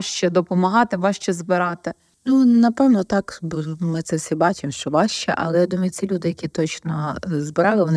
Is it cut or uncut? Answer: uncut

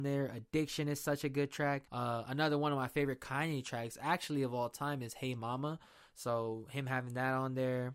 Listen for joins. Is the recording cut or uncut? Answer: cut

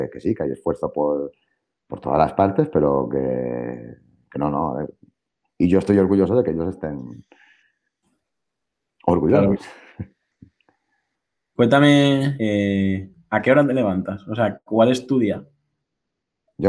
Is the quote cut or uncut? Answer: cut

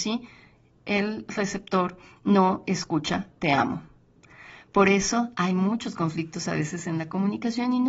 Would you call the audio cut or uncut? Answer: uncut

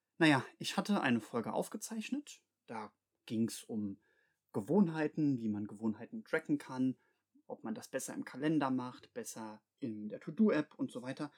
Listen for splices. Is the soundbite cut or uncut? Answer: uncut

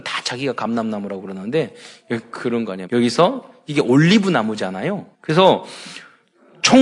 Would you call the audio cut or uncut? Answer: cut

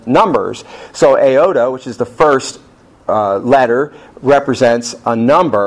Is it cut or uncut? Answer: uncut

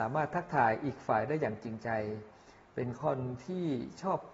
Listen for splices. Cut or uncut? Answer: uncut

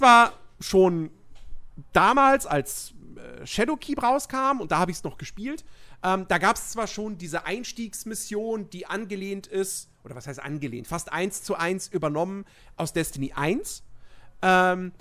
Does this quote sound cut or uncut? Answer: uncut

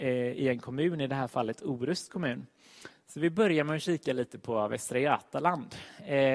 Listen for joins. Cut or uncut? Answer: cut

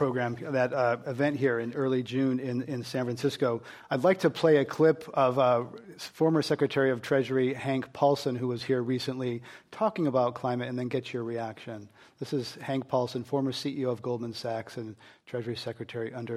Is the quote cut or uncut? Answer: uncut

